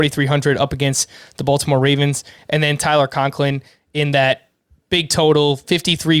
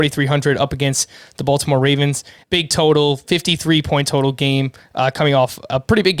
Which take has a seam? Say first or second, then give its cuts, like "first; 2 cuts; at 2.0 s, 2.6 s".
second; 1 cut; at 2.4 s